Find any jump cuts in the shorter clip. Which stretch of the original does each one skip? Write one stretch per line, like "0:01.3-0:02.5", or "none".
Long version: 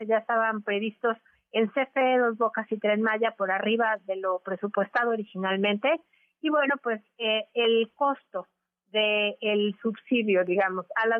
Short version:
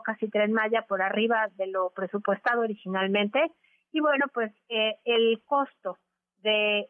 none